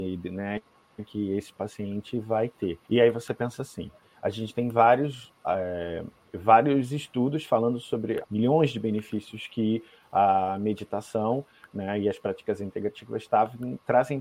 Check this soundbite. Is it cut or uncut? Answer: cut